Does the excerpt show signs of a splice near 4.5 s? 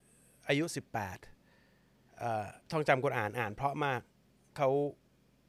no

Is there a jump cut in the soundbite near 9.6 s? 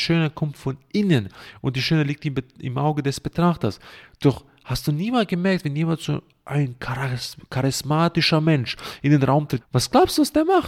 yes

